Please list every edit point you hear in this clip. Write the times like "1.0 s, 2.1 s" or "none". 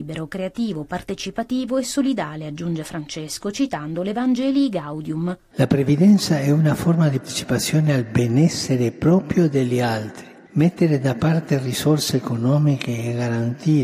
7.2 s